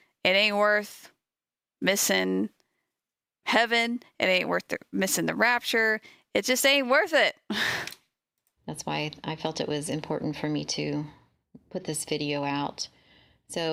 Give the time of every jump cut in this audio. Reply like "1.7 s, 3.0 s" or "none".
none